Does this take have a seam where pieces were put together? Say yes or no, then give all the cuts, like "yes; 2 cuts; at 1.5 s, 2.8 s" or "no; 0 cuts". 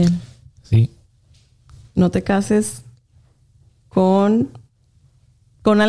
no; 0 cuts